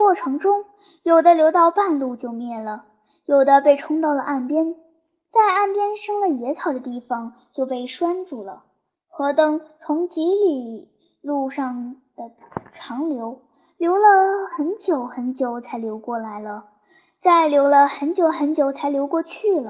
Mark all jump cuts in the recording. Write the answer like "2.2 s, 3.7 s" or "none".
8.9 s